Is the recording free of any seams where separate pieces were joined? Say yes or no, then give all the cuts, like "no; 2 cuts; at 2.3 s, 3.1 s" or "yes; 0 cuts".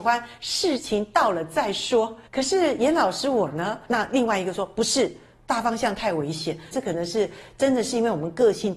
no; 3 cuts; at 2.3 s, 3.9 s, 6.7 s